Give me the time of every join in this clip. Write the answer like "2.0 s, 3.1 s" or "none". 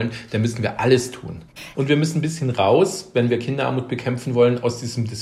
1.7 s